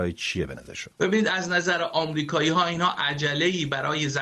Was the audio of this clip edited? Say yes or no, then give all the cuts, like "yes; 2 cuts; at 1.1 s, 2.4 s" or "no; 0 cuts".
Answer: yes; 1 cut; at 0.9 s